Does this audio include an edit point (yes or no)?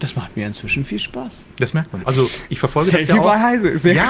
yes